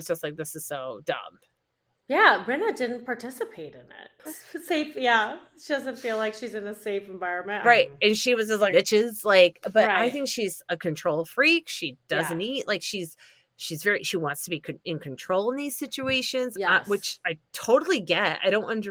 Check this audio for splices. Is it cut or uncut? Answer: cut